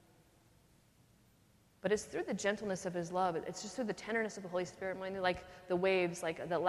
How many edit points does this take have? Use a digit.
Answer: 0